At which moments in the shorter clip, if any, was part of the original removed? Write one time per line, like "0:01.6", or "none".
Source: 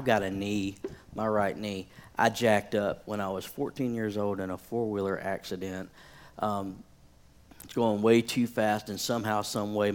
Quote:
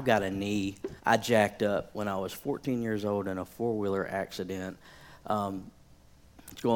0:01.0